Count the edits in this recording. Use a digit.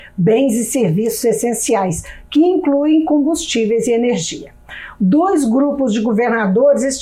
1